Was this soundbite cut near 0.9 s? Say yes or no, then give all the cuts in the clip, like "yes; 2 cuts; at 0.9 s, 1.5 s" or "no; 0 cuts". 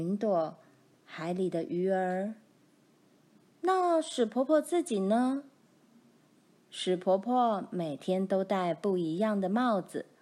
yes; 1 cut; at 0.9 s